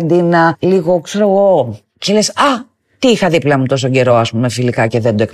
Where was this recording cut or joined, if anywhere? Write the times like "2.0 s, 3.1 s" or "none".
none